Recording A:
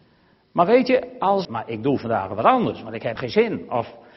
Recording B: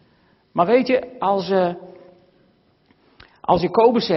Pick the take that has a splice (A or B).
A